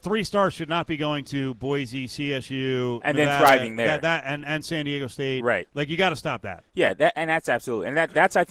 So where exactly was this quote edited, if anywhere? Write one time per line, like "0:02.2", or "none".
none